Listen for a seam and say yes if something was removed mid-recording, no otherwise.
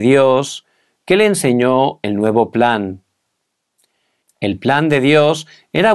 yes